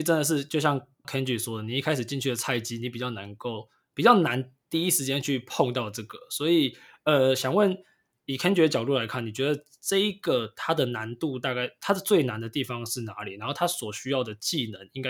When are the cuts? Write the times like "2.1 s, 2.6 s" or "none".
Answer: 1.0 s

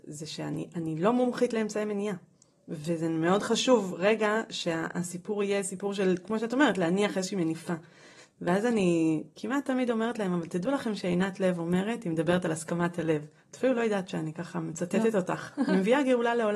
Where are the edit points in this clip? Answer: none

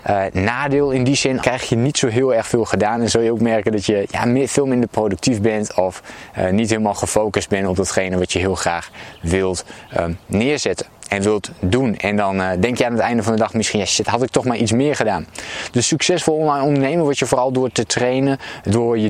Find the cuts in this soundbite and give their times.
1.4 s

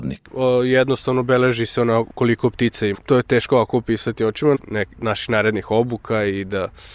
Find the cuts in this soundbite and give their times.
2.9 s, 4.5 s

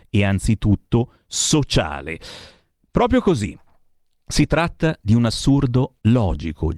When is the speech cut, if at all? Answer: none

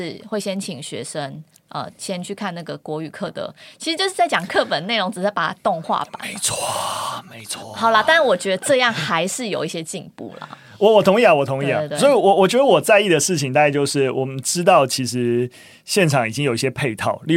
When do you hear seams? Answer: none

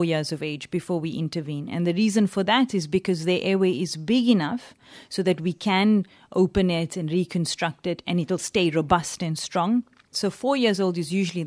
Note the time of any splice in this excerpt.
10.1 s

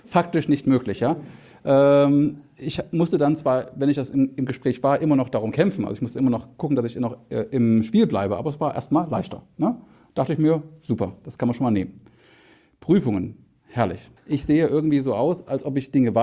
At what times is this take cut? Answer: 14.2 s

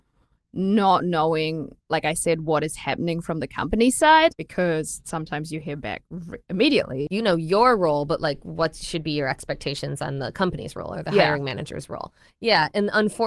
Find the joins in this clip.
4.3 s, 7.1 s

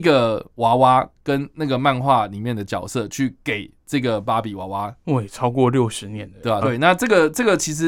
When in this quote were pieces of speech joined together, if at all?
5.0 s, 6.6 s

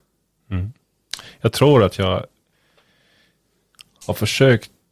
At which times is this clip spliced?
none

